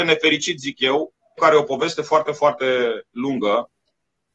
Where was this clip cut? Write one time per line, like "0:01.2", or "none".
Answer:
0:01.4